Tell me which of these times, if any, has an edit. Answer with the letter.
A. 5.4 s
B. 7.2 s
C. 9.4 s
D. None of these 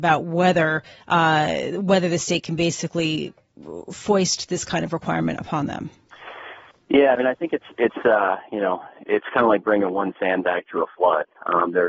D